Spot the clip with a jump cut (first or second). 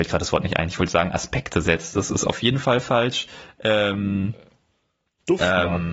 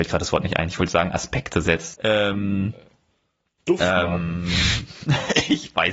second